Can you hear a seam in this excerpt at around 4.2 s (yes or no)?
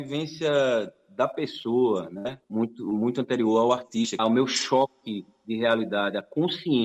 yes